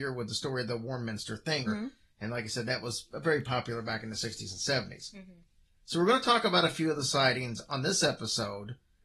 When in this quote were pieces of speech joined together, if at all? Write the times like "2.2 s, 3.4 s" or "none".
1.7 s